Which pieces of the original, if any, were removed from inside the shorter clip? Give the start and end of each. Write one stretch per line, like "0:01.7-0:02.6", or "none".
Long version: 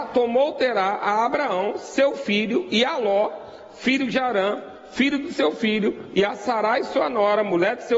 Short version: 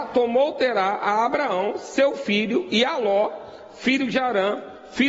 none